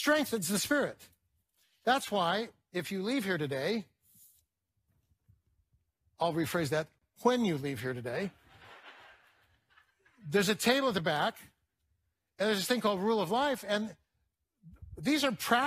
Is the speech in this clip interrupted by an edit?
no; 0 cuts

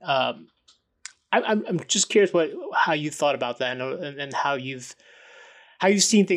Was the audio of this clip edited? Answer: no; 0 cuts

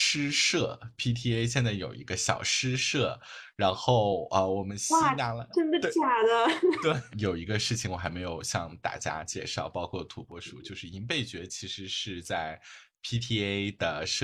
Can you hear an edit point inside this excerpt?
yes; 1 cut; at 7.1 s

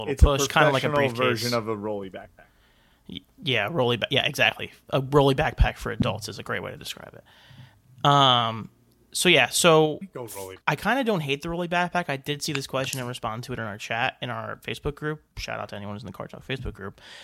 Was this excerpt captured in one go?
no; 1 cut; at 10.6 s

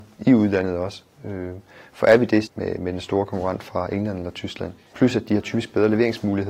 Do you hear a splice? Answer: yes; 2 cuts; at 2.5 s, 4.9 s

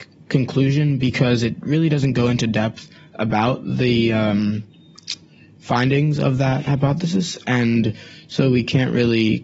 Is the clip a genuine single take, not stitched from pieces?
yes; 0 cuts

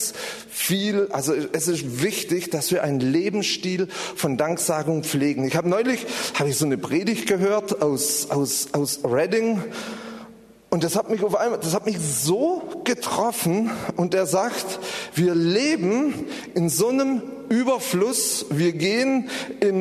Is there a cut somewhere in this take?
no; 0 cuts

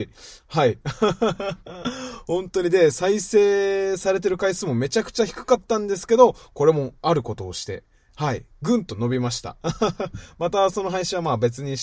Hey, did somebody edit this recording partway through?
no; 0 cuts

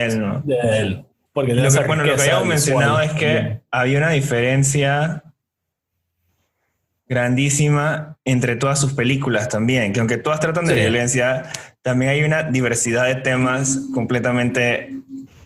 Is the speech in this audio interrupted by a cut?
no; 0 cuts

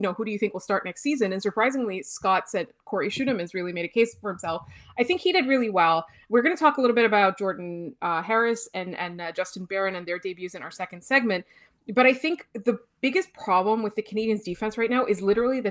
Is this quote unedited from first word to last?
yes; 0 cuts

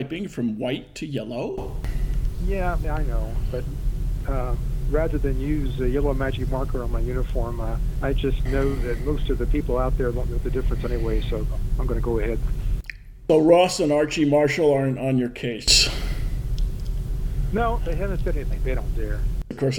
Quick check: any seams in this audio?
yes; 1 cut; at 2.8 s

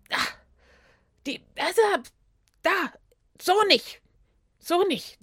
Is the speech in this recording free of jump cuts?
yes; 0 cuts

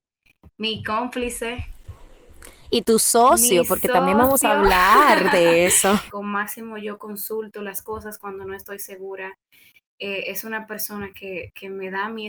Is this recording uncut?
no; 1 cut; at 6.1 s

